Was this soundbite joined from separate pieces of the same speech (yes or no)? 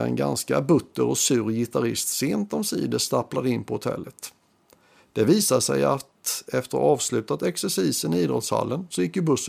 no